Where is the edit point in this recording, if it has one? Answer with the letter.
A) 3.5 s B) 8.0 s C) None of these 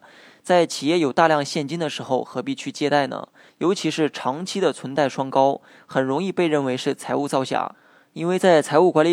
A